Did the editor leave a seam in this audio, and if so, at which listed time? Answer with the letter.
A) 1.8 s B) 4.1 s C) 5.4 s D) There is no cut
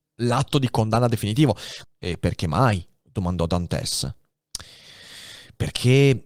A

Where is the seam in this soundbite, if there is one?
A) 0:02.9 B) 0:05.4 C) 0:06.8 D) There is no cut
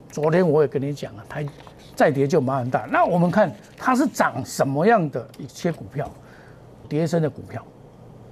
C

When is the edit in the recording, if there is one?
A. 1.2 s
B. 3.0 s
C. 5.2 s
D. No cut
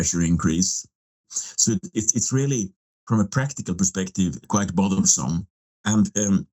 A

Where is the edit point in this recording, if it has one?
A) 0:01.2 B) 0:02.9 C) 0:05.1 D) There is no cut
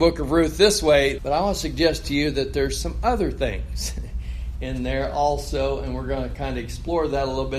A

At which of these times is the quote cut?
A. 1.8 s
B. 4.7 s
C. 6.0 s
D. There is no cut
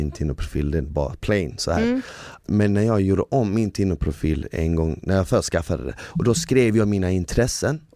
D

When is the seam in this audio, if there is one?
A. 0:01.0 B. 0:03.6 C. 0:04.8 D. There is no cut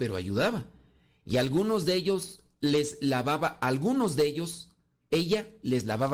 D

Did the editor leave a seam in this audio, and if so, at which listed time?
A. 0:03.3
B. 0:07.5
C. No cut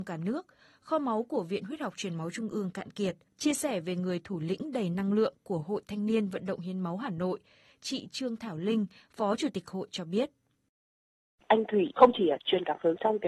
A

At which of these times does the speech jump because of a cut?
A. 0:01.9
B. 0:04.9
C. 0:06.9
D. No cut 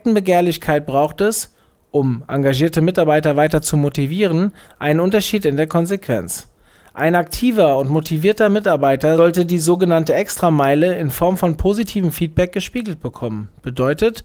D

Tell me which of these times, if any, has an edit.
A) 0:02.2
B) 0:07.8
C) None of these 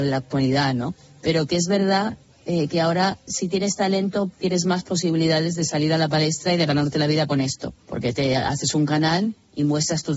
B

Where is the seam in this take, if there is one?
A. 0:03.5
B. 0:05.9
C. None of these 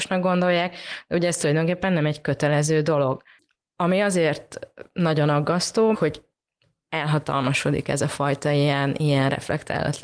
B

